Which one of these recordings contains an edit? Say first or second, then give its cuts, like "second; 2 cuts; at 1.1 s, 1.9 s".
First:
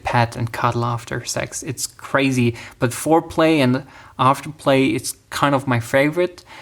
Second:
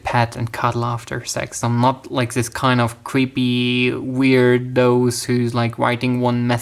second; 1 cut; at 1.6 s